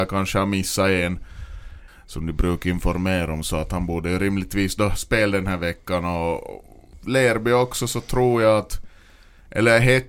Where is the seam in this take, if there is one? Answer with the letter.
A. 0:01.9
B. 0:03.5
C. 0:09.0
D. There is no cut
A